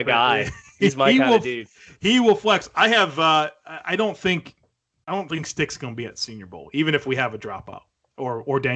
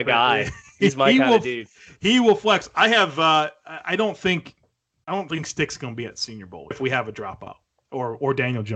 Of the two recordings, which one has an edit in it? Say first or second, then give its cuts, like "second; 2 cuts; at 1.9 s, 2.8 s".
second; 1 cut; at 6.7 s